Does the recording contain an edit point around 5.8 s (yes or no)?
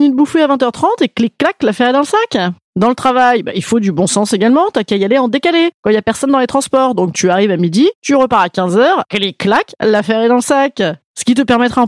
no